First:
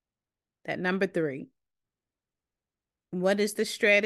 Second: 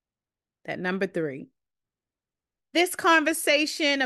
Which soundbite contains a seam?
second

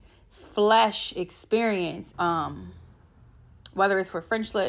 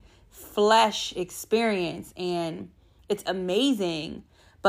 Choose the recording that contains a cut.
first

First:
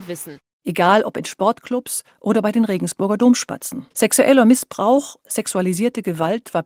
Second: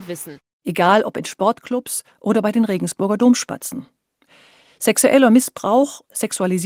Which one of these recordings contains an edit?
first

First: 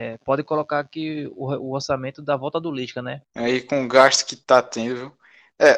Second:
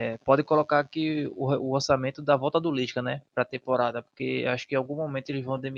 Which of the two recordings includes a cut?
first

